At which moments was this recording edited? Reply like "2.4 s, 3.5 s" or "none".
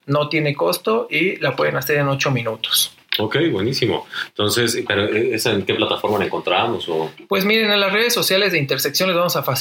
none